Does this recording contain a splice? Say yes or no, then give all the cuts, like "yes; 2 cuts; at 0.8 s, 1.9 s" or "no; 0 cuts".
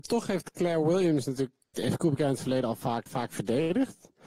yes; 2 cuts; at 1.7 s, 3.1 s